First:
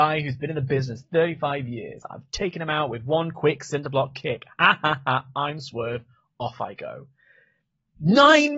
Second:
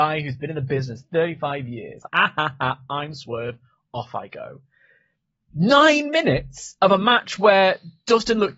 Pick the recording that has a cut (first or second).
second